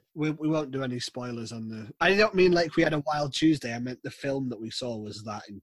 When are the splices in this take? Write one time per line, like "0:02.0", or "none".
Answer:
0:02.0